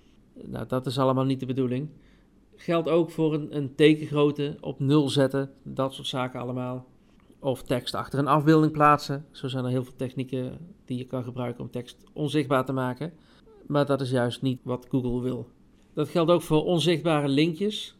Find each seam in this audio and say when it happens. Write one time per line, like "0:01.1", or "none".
0:14.6